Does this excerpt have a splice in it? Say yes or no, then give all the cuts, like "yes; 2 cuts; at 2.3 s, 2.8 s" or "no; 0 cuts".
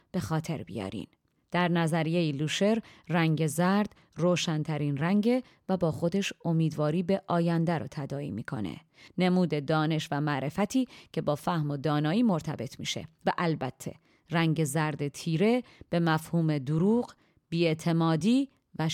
yes; 1 cut; at 9.1 s